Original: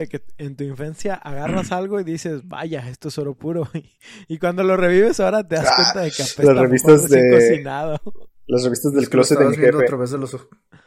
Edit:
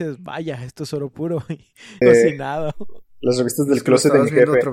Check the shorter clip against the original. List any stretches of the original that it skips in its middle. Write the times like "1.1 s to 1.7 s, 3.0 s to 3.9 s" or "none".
4.3 s to 7.3 s